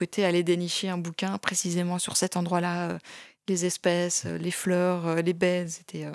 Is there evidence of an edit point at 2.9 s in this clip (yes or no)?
no